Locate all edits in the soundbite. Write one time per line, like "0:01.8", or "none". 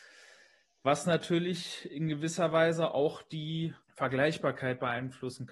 0:03.8